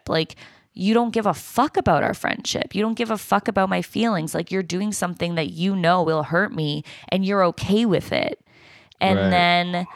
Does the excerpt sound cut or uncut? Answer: uncut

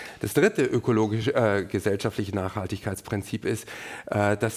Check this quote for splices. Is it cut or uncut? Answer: uncut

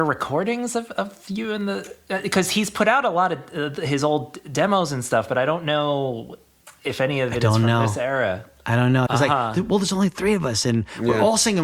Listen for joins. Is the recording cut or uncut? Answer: cut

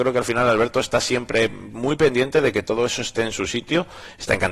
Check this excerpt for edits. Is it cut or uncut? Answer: uncut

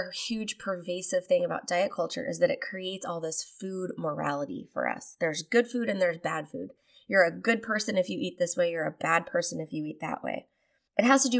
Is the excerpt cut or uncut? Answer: uncut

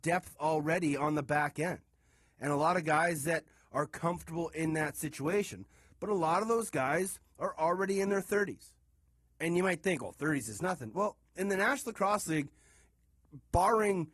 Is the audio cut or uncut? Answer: uncut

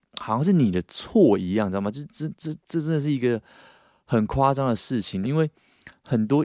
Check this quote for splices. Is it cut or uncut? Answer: cut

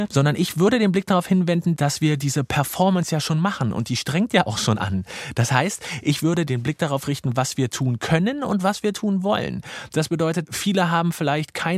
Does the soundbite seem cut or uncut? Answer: uncut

